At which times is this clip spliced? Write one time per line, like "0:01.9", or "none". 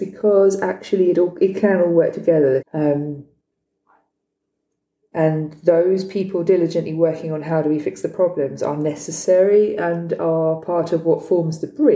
0:02.6